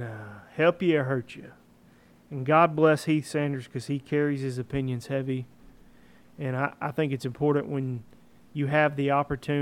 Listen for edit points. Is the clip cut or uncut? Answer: uncut